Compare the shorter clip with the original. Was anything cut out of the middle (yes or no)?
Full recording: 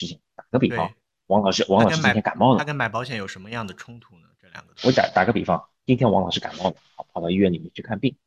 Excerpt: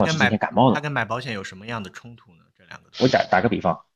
no